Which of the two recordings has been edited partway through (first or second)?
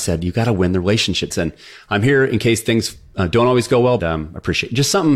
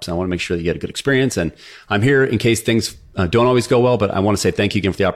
first